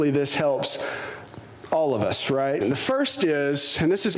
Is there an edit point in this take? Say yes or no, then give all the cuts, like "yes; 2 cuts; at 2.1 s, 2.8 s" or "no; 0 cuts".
yes; 1 cut; at 2.6 s